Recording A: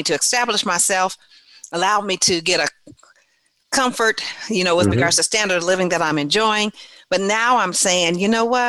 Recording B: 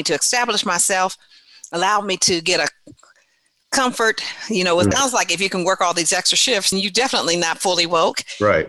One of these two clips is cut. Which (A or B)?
B